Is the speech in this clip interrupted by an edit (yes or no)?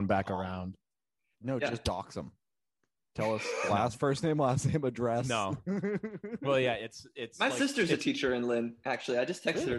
yes